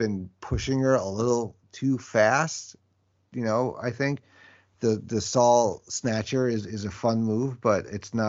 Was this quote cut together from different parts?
no; 0 cuts

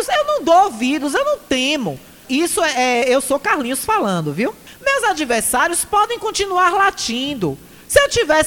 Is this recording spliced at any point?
yes; 2 cuts; at 2.2 s, 4.7 s

